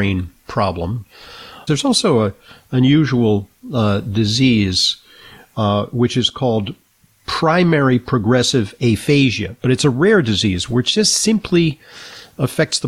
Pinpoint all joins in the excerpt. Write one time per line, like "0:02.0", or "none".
0:01.7